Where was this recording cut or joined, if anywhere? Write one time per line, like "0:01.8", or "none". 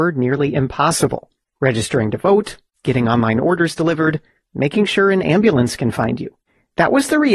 none